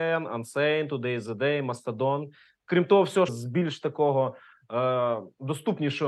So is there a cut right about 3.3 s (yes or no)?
yes